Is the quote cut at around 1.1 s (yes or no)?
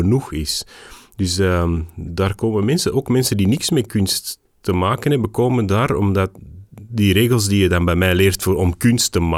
no